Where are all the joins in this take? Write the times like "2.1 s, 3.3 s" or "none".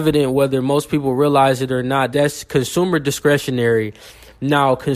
2.1 s